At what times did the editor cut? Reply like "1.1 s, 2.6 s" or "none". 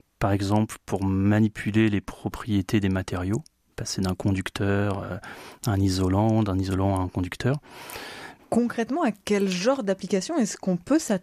8.4 s